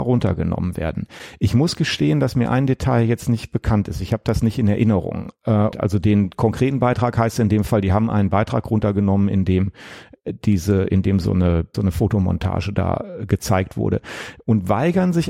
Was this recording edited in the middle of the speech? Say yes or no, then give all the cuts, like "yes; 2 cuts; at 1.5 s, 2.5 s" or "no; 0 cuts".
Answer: yes; 2 cuts; at 5.7 s, 11.7 s